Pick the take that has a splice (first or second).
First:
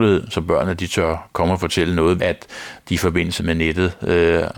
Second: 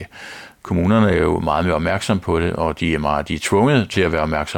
first